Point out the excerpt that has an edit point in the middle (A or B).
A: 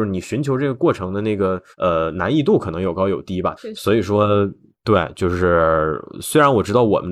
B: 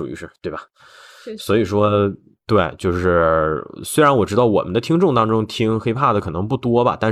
A